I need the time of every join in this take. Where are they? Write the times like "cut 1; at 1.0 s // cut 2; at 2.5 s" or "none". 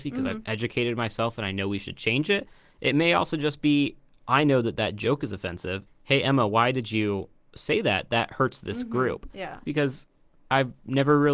cut 1; at 5.9 s // cut 2; at 9.6 s